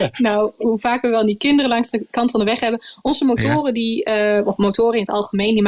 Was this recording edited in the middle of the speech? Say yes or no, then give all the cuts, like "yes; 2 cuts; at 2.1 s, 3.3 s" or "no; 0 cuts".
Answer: no; 0 cuts